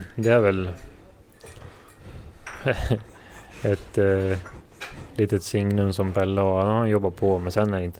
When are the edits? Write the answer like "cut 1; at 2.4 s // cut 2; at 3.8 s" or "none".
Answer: none